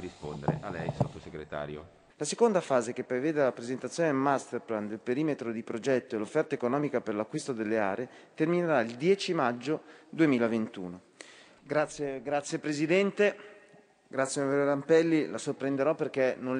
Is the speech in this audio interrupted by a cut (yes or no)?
yes